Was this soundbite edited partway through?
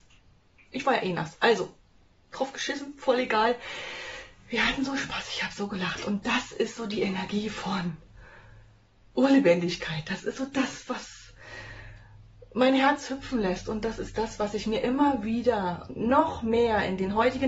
no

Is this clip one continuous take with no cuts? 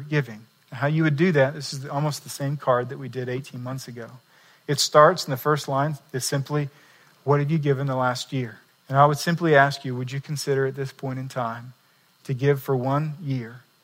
no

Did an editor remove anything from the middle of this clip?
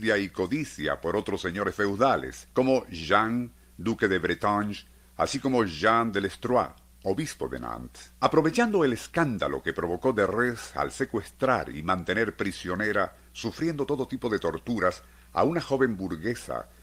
yes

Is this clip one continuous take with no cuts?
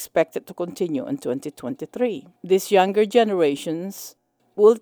no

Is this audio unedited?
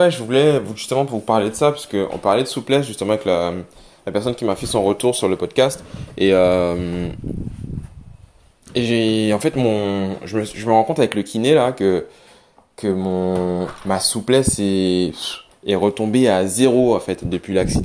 yes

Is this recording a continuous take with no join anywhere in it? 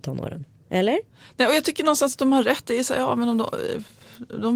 yes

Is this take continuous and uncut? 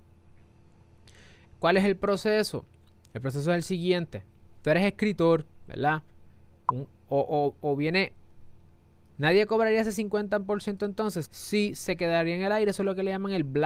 no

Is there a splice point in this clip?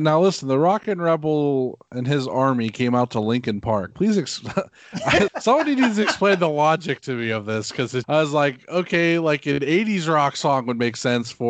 yes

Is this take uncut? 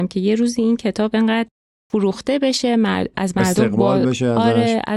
yes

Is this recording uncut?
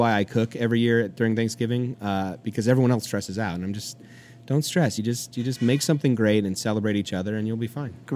yes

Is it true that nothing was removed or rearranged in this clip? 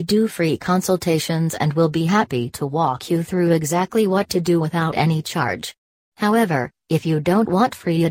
yes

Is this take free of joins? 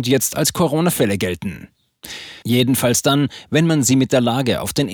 no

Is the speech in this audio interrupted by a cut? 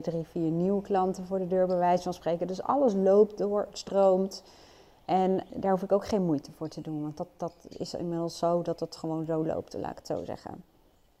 yes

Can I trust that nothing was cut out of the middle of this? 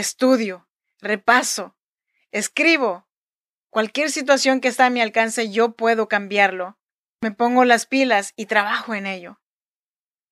yes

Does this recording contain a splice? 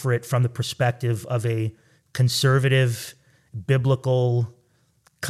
no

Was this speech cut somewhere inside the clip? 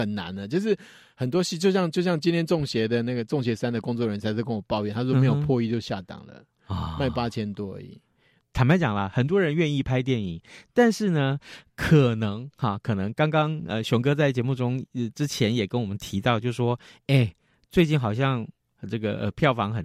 yes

